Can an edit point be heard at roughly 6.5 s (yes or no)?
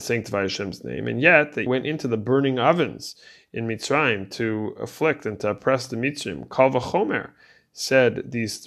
no